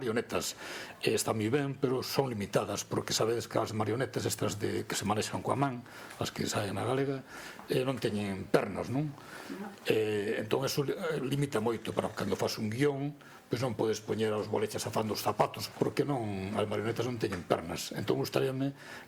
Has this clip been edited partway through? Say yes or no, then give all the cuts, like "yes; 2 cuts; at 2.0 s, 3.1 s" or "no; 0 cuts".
yes; 1 cut; at 15.7 s